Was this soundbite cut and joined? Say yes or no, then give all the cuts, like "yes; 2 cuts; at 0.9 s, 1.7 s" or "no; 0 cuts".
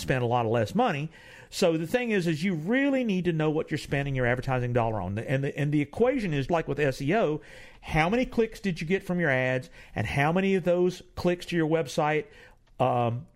yes; 1 cut; at 6.5 s